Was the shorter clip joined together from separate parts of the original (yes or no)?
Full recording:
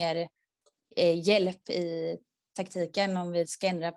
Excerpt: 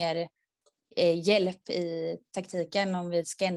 yes